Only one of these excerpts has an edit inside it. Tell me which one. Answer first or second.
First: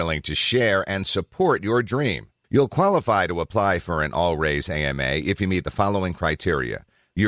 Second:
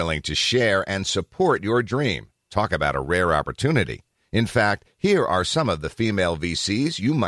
first